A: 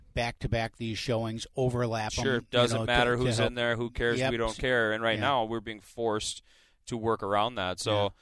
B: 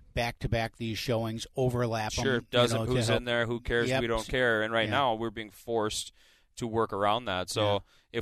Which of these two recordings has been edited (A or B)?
B